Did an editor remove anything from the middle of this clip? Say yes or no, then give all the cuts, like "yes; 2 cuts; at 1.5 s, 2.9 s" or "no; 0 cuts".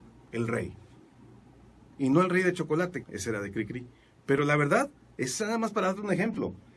yes; 1 cut; at 3.0 s